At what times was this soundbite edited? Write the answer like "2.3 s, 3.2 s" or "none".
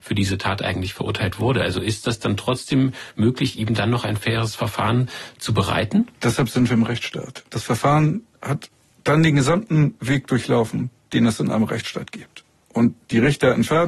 7.5 s